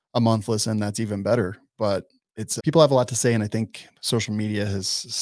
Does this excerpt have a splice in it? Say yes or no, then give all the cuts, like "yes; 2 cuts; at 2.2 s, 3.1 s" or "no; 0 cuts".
yes; 1 cut; at 2.6 s